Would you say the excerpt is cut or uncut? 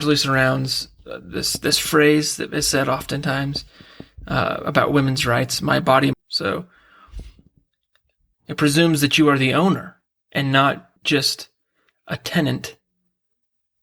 cut